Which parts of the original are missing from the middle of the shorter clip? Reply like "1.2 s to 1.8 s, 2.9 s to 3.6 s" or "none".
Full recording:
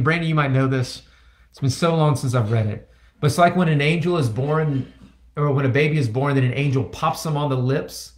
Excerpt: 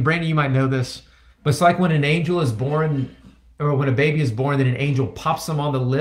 1.3 s to 3.1 s

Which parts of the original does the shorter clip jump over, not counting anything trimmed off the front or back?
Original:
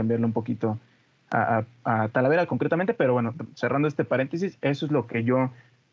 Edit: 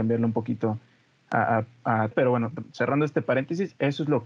2.1 s to 2.9 s

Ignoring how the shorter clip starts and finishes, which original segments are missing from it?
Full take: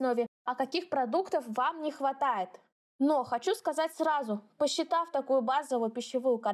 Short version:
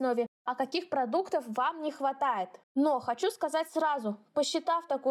2.6 s to 2.9 s

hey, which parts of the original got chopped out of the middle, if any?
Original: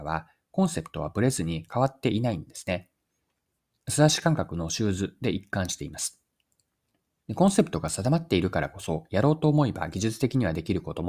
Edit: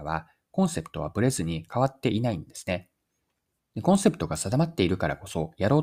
3.8 s to 7.3 s

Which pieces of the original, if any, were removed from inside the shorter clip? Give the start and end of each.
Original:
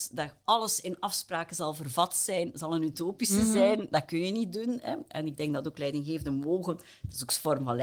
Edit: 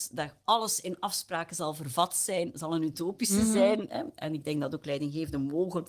3.9 s to 4.8 s

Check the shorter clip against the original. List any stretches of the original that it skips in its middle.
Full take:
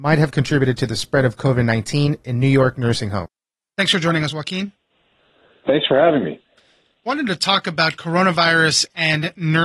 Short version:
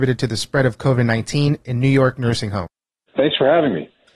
3.7 s to 5.6 s

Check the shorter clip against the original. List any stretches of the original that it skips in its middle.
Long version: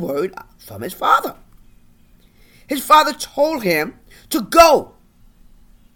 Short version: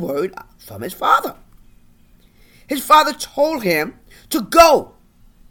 none

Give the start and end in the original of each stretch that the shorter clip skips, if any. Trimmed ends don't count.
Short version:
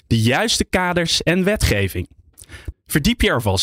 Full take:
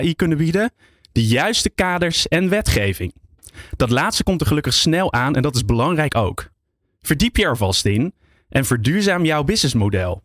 3.8 s to 6.9 s

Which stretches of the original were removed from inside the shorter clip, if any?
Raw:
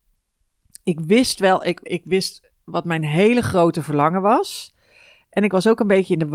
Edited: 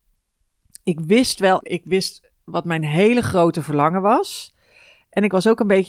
1.6 s to 1.8 s

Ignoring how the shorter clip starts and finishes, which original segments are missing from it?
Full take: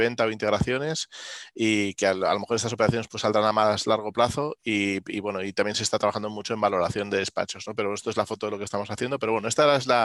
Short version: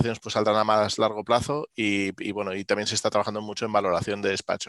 none

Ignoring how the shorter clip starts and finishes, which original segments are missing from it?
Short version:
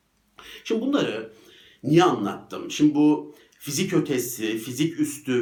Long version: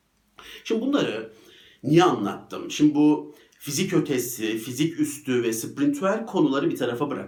none

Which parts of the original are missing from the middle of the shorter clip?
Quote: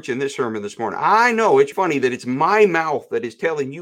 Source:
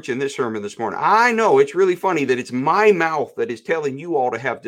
1.7 s to 2.0 s

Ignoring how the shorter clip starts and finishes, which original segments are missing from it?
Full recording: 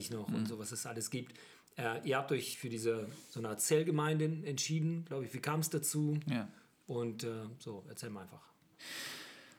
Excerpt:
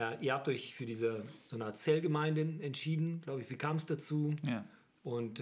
none

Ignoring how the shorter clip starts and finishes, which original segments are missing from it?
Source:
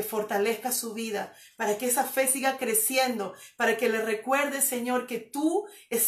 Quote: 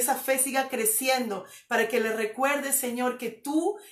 none

